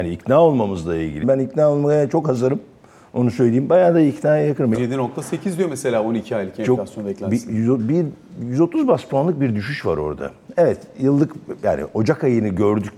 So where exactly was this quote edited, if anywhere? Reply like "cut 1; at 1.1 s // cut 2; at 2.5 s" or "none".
cut 1; at 1.2 s // cut 2; at 4.7 s